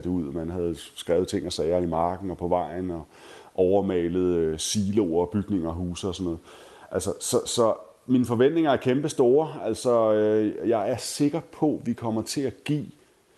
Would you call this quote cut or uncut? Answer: uncut